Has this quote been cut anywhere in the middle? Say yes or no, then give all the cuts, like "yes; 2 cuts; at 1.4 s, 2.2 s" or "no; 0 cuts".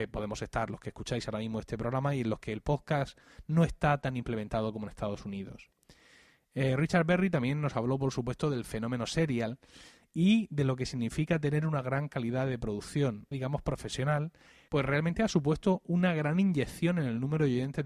yes; 2 cuts; at 13.3 s, 14.7 s